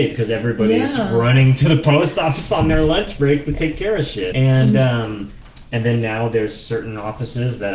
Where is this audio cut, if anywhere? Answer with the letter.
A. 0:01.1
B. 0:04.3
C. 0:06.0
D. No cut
B